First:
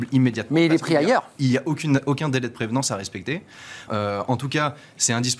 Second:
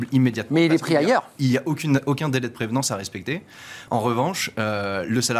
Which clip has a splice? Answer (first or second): first